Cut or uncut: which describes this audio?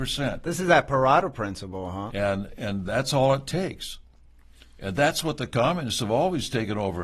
cut